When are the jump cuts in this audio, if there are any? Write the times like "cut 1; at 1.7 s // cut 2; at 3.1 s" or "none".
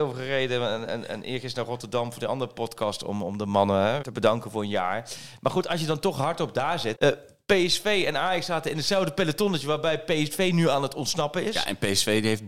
cut 1; at 4.0 s // cut 2; at 6.9 s

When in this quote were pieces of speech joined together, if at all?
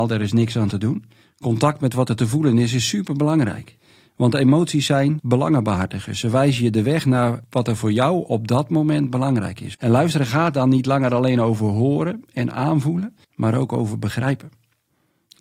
cut 1; at 1.2 s // cut 2; at 9.7 s // cut 3; at 13.2 s

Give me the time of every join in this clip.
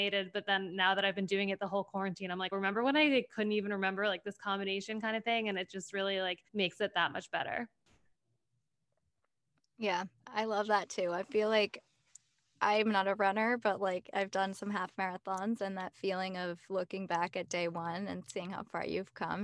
cut 1; at 2.5 s // cut 2; at 6.5 s

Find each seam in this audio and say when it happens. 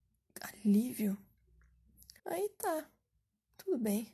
cut 1; at 2.2 s

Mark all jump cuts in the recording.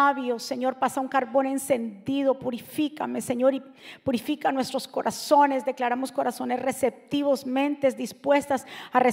none

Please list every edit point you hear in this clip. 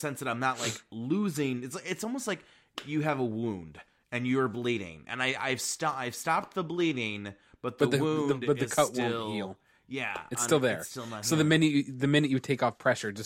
none

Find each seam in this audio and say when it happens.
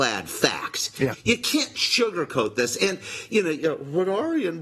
cut 1; at 1.1 s

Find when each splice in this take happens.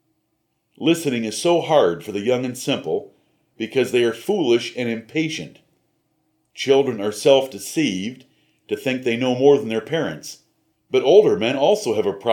cut 1; at 10.7 s

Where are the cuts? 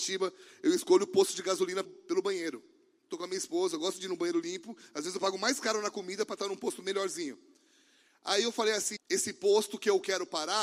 cut 1; at 1.8 s // cut 2; at 9.0 s

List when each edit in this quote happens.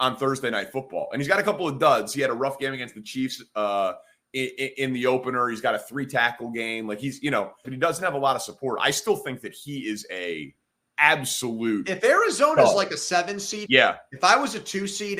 cut 1; at 7.6 s // cut 2; at 13.7 s

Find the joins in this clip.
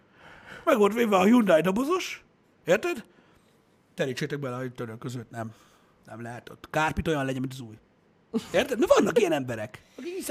none

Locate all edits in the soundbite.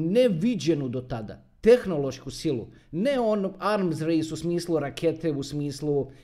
none

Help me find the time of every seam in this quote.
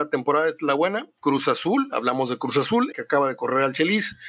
cut 1; at 1.2 s // cut 2; at 2.9 s

